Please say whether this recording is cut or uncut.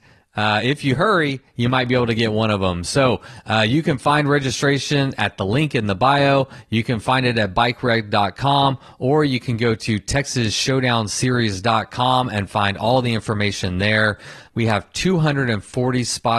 cut